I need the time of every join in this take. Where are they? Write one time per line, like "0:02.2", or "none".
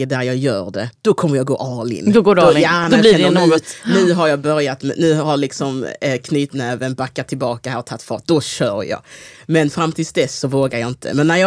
none